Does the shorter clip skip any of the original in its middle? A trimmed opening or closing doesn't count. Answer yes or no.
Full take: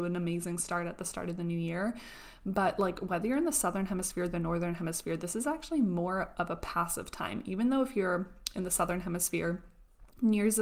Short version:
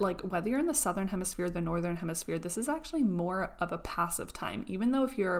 no